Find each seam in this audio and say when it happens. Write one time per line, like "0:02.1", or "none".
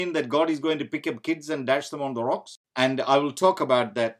0:02.6